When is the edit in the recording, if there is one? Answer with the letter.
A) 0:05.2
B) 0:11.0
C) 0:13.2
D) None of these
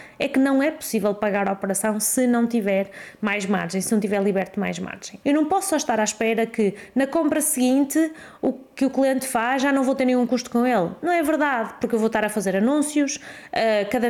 A